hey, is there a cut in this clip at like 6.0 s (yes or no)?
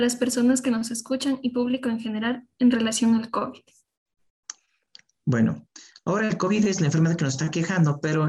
no